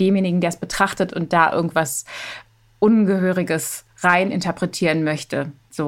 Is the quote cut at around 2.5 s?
no; 0 cuts

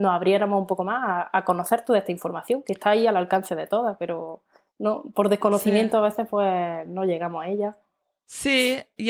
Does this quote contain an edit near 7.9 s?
no; 0 cuts

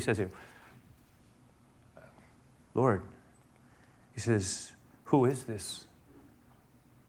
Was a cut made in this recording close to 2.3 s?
no; 0 cuts

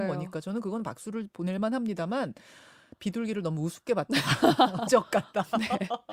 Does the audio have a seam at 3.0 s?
no; 1 cut; at 4.9 s

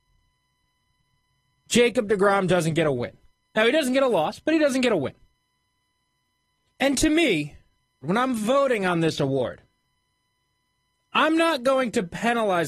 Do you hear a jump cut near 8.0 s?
yes; 1 cut; at 8.0 s

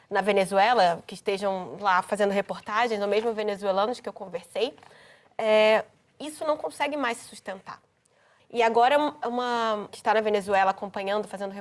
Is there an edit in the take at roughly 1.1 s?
no; 2 cuts; at 8.4 s, 9.9 s

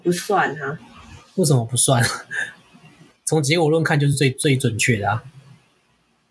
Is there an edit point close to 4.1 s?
no; 0 cuts

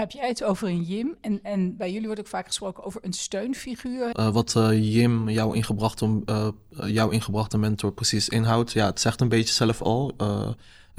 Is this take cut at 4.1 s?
yes; 1 cut; at 4.1 s

